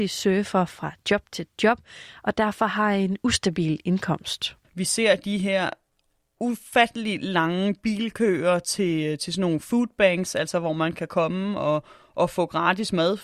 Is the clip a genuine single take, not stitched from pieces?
yes; 0 cuts

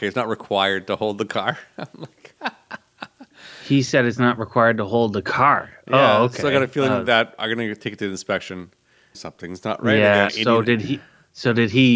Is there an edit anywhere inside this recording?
yes; 2 cuts; at 9.1 s, 10.3 s

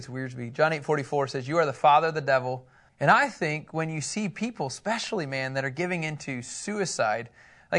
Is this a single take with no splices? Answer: no; 1 cut; at 2.9 s

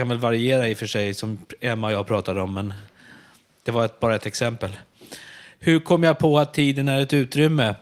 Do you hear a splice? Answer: no; 0 cuts

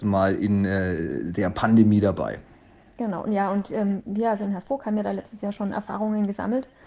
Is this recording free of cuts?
yes; 0 cuts

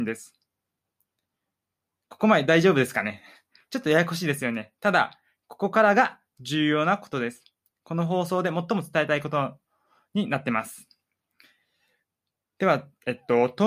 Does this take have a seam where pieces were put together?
no; 0 cuts

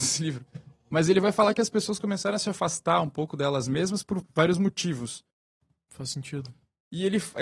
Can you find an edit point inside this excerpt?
yes; 2 cuts; at 4.2 s, 5.9 s

